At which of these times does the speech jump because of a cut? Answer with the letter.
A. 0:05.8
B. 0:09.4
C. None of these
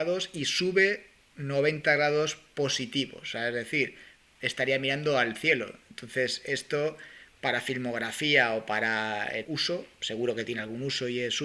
B